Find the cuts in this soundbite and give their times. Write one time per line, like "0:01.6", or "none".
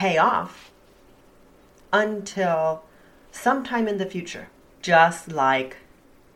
0:04.7